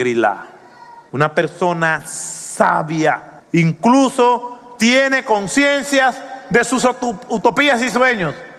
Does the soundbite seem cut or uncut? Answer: cut